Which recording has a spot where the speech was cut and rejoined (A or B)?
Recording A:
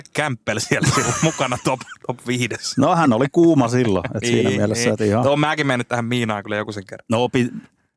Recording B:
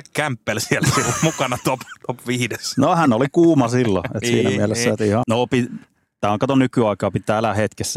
B